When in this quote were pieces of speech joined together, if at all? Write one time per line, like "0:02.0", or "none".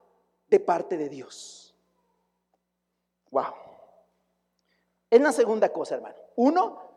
none